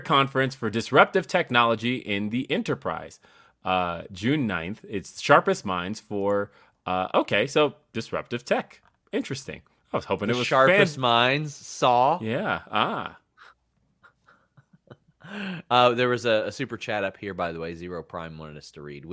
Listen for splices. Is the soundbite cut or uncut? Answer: uncut